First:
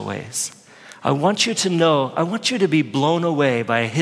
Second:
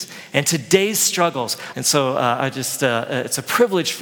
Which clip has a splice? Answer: second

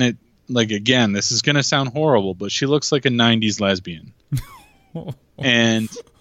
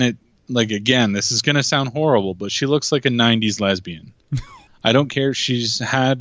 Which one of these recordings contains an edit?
second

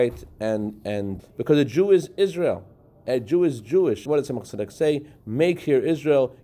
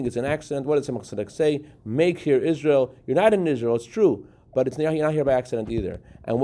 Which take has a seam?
first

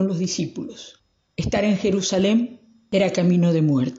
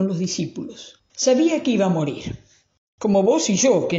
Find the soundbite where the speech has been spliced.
second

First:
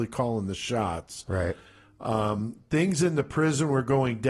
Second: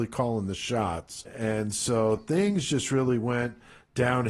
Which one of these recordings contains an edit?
second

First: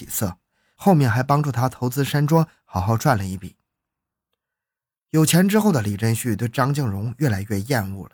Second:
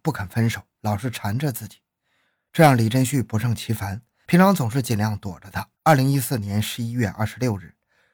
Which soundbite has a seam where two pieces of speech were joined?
second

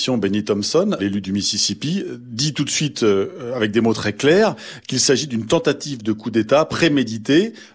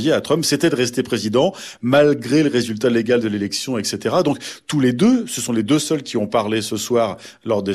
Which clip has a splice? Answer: first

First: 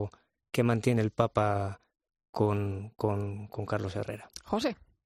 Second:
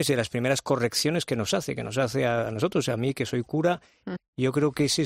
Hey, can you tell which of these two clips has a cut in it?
second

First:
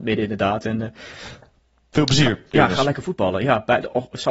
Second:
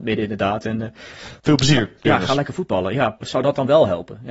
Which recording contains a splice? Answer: second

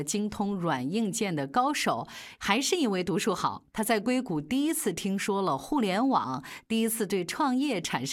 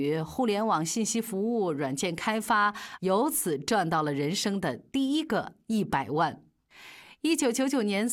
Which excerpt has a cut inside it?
first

